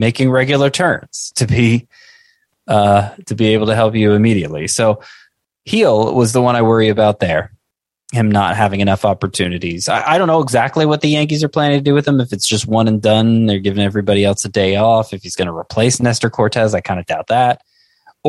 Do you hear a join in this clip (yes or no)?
no